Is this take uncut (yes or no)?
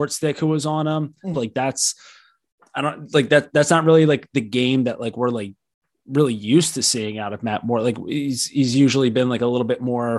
no